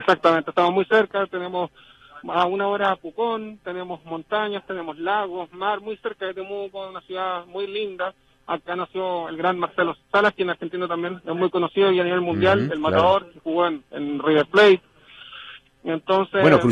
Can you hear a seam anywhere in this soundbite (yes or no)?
no